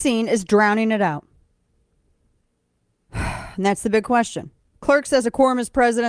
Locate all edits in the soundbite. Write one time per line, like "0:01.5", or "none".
0:03.0